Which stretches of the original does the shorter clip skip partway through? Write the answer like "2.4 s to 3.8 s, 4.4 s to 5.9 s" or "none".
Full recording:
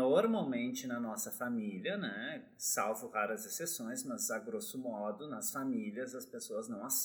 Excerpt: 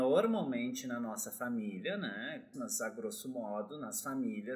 2.5 s to 4.0 s